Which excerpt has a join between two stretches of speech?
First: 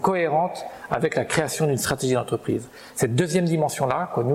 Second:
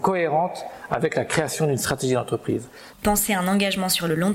second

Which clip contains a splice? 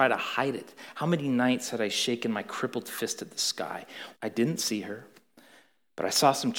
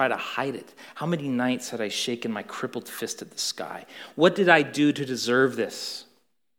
first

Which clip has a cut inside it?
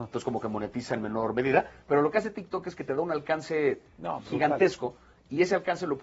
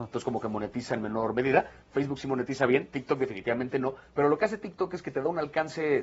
first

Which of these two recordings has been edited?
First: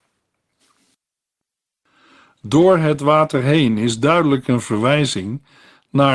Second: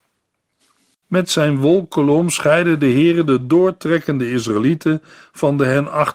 second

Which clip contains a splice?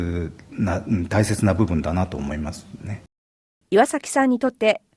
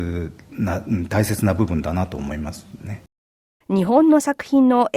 second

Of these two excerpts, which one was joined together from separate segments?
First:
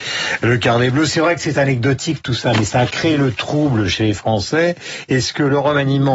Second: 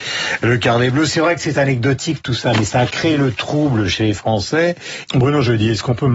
second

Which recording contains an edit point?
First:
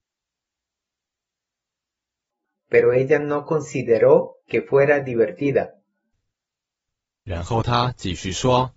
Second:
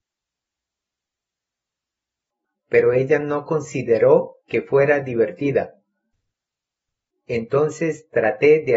second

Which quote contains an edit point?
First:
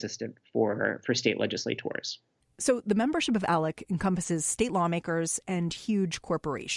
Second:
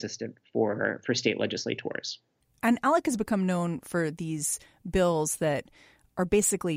first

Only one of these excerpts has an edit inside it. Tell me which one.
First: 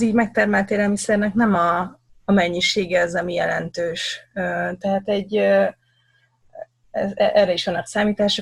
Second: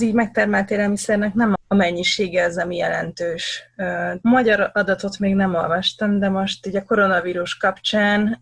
second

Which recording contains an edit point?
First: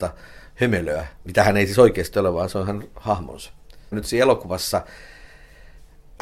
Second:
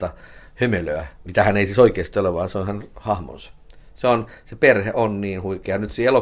first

